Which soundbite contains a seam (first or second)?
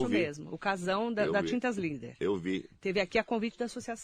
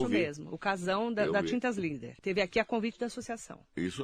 second